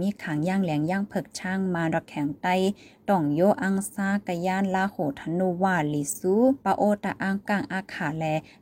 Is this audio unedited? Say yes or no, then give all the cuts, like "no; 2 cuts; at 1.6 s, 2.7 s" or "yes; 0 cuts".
no; 1 cut; at 7.4 s